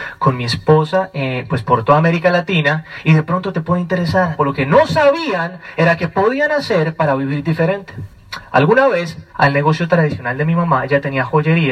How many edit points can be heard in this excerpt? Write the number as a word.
two